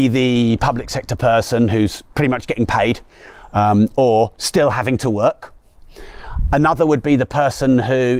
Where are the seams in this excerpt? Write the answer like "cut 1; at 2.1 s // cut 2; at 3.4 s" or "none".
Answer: none